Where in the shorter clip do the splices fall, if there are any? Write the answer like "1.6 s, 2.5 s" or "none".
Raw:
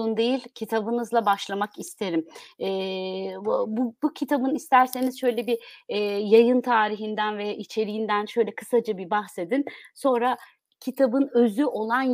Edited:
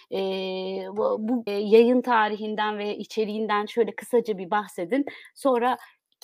1.5 s